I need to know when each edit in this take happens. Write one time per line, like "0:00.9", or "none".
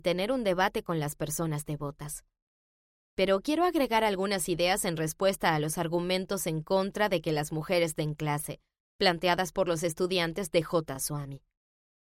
none